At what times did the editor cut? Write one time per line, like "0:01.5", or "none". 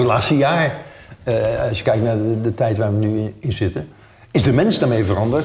none